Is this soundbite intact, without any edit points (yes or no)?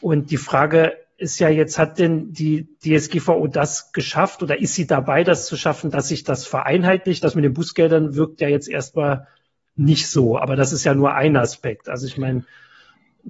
yes